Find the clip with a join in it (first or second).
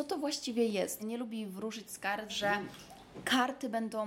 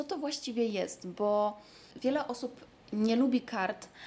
first